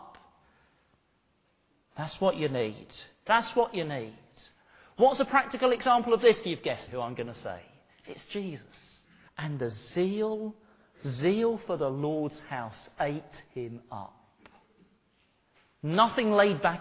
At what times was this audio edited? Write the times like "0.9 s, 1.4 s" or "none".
3.3 s, 6.9 s, 9.3 s